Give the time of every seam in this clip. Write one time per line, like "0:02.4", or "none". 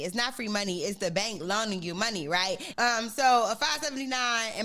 0:02.7